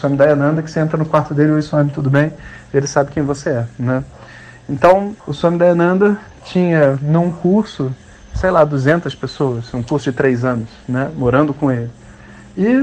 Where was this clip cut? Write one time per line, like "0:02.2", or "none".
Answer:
0:05.2